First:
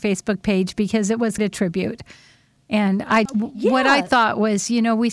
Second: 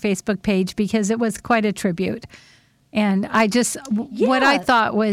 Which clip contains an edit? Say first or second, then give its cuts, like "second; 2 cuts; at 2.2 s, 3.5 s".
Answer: first; 2 cuts; at 1.4 s, 3.3 s